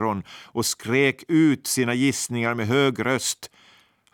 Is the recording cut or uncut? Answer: uncut